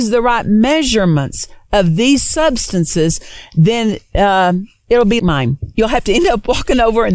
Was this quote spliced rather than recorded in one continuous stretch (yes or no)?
yes